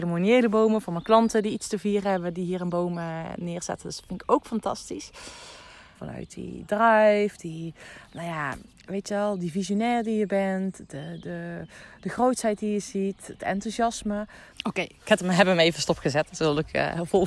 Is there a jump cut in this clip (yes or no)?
yes